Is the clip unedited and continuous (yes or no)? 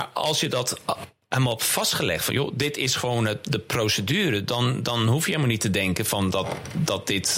yes